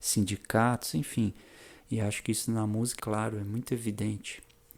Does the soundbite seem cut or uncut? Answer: cut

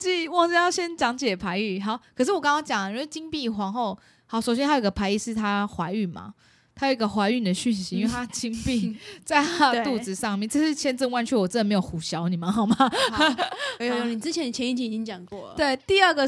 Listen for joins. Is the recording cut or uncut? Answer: uncut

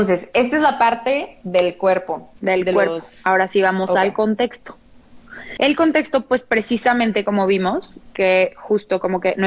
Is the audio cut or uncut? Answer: uncut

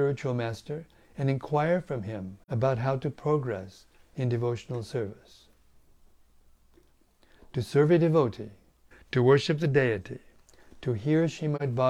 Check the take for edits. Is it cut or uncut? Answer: cut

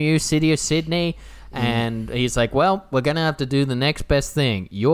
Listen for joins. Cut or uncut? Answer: uncut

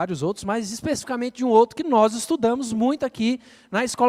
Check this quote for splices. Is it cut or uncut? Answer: uncut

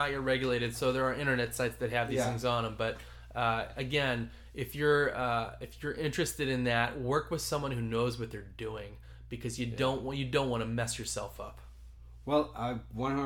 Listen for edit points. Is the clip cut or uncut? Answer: uncut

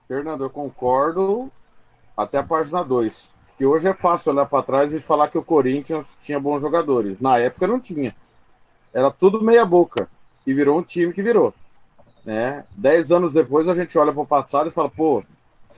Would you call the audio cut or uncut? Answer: uncut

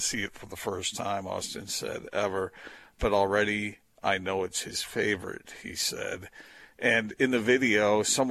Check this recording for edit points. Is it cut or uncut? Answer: uncut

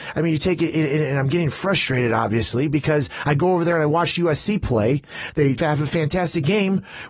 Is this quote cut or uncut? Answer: cut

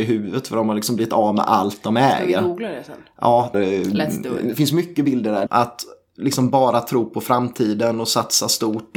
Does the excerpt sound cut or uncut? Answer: cut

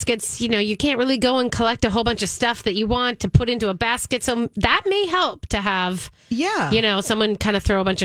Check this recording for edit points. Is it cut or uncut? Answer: uncut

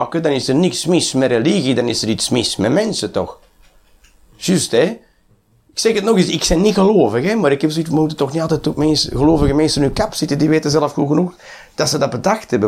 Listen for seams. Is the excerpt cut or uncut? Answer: uncut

